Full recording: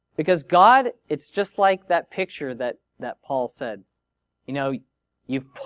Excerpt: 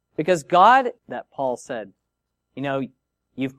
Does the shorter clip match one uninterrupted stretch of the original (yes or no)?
no